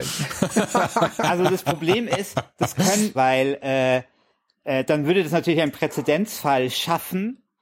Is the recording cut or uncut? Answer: cut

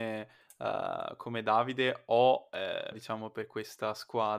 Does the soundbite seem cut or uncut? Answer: cut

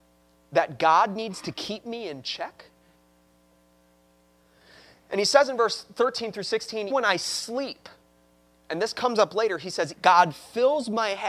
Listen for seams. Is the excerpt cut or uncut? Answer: cut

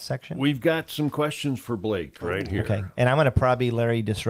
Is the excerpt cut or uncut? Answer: uncut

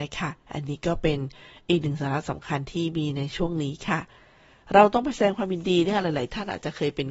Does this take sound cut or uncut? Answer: uncut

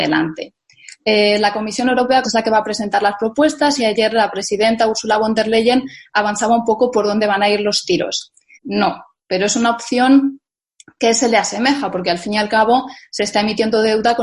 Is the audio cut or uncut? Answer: cut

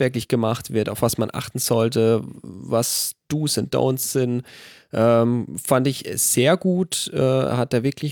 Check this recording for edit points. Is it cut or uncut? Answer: uncut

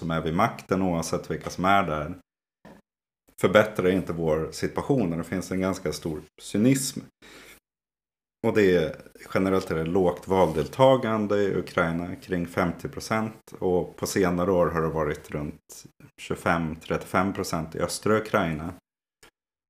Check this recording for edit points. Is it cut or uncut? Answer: uncut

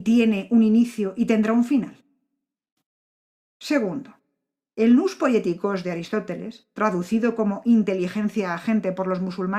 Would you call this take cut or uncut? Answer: uncut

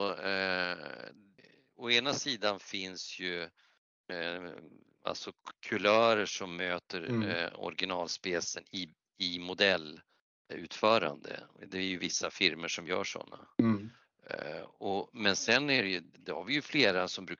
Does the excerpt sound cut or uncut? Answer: cut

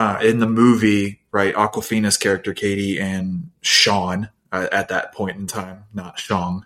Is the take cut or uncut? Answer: uncut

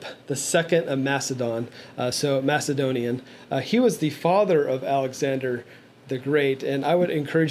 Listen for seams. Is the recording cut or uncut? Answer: uncut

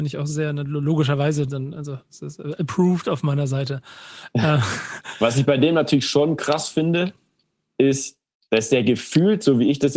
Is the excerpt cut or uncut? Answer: uncut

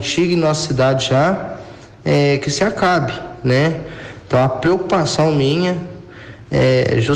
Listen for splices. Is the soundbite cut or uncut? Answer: uncut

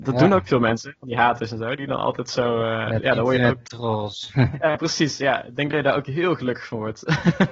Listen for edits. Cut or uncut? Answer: uncut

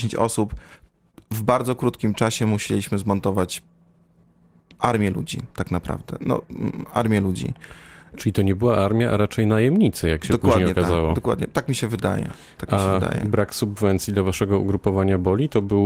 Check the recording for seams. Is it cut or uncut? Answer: uncut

